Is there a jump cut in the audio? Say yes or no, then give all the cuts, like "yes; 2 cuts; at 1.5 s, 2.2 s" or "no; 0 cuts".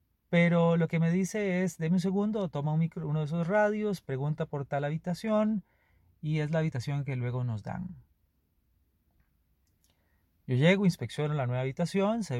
no; 0 cuts